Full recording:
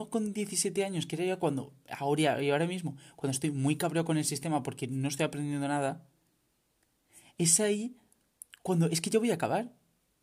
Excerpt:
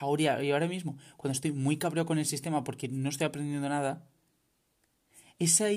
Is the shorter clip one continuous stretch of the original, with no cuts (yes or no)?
yes